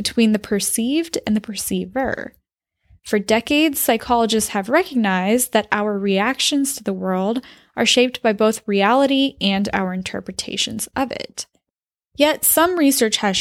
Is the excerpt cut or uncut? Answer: uncut